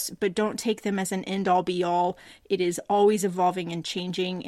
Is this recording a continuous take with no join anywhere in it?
yes; 0 cuts

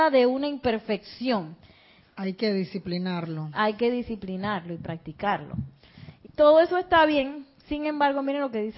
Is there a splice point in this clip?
yes; 2 cuts; at 2.0 s, 6.2 s

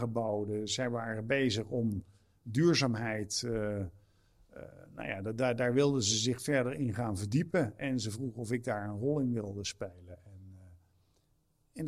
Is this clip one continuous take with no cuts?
yes; 0 cuts

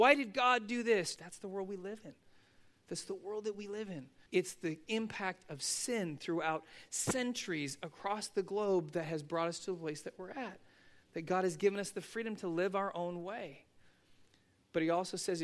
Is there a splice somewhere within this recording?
yes; 2 cuts; at 1.2 s, 4.3 s

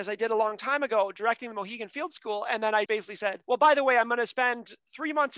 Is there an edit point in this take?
yes; 1 cut; at 2.9 s

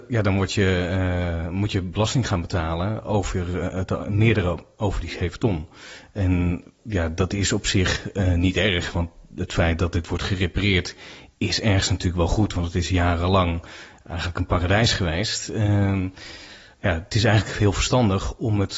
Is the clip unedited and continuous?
yes; 0 cuts

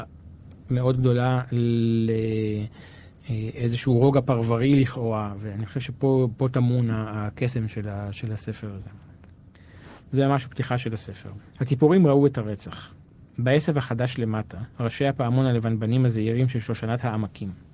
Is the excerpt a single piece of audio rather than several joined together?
no; 1 cut; at 11.5 s

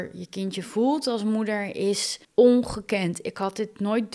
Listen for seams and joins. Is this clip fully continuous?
no; 1 cut; at 2.2 s

